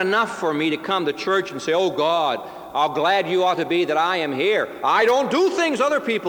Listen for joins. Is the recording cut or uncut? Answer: uncut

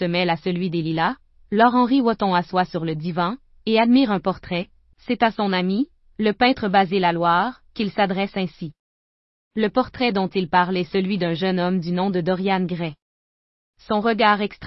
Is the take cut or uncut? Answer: cut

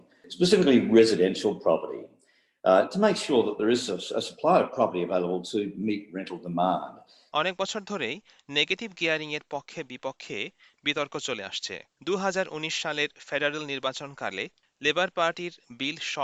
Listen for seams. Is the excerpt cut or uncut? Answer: cut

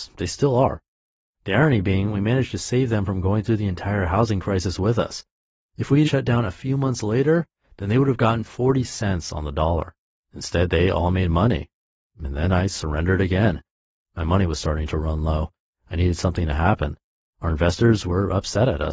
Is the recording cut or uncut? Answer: cut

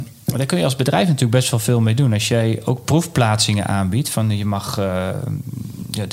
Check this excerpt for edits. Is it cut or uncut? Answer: uncut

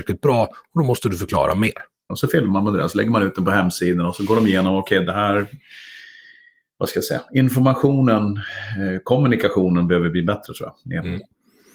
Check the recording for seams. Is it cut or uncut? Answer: cut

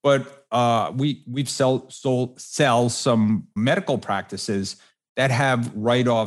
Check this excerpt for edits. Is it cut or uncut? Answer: cut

